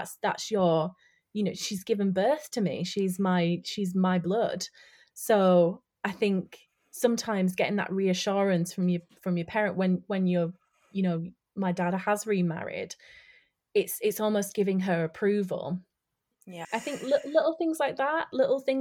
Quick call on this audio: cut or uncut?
cut